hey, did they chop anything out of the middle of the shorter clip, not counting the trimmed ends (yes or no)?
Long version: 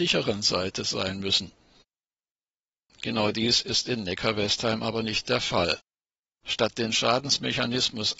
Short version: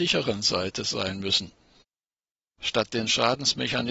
yes